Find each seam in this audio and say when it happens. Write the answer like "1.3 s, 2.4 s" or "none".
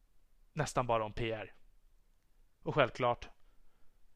2.6 s